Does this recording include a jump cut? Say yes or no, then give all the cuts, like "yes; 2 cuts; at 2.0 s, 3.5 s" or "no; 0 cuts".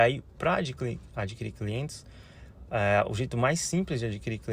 no; 0 cuts